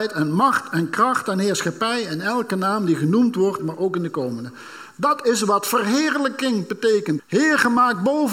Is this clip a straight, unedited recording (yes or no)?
no